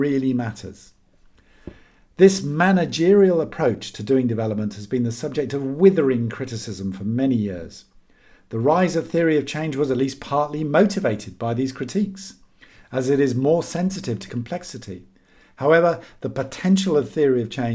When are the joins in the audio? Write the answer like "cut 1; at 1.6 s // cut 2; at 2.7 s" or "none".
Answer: none

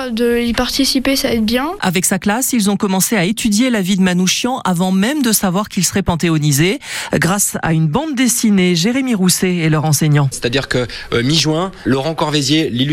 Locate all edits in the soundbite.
cut 1; at 10.3 s

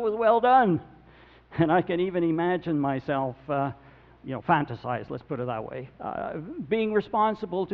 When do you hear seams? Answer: cut 1; at 4.1 s // cut 2; at 5.9 s

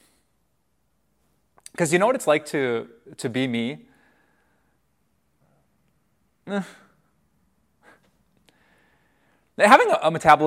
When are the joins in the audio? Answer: none

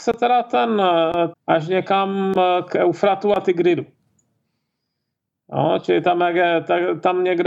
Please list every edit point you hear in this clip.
cut 1; at 1.3 s

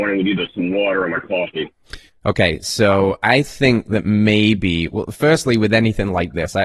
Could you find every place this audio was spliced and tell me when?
none

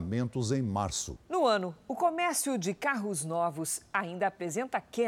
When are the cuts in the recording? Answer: cut 1; at 1.2 s

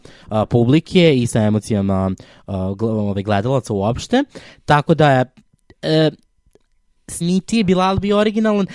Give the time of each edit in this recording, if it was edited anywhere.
cut 1; at 7.2 s

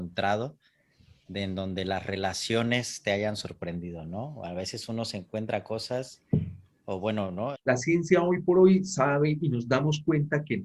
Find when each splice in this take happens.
cut 1; at 7.5 s

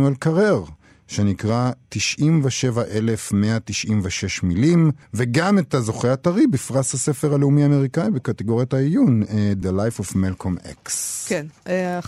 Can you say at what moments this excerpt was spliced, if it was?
cut 1; at 5.0 s // cut 2; at 9.6 s

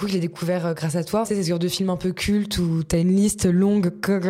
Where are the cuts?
cut 1; at 1.2 s

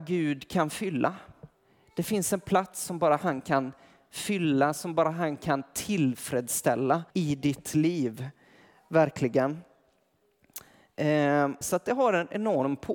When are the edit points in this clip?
cut 1; at 7.1 s // cut 2; at 11.6 s

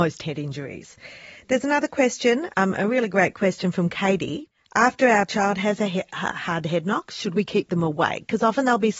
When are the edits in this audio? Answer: none

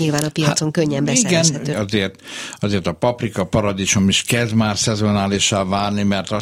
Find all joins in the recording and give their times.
cut 1; at 1.7 s

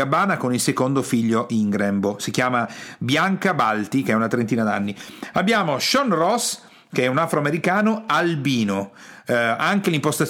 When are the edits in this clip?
cut 1; at 5.3 s

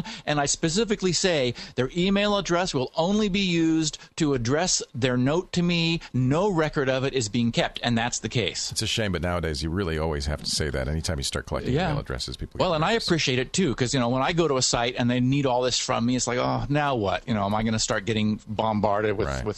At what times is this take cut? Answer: none

